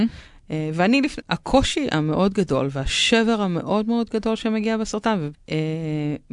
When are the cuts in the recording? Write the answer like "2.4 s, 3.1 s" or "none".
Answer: 1.2 s, 5.3 s